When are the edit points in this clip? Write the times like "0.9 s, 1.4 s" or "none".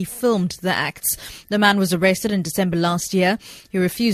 none